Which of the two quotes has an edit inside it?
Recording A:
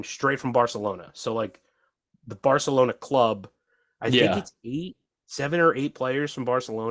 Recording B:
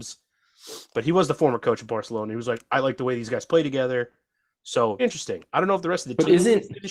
B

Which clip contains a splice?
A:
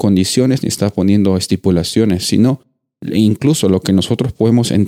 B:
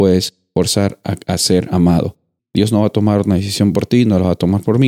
B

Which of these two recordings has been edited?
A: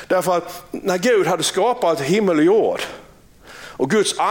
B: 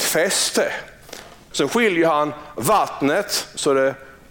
B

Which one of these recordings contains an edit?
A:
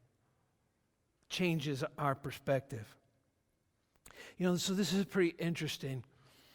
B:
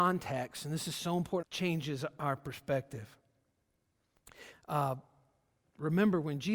B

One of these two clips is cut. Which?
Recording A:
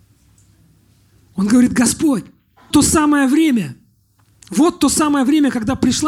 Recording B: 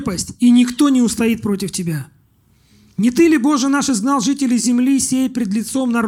A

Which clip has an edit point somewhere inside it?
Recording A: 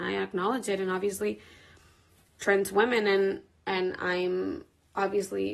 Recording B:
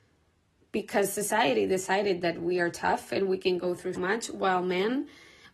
B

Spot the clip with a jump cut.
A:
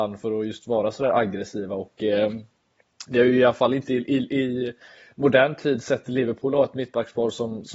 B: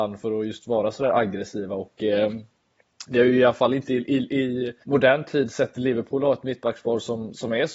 B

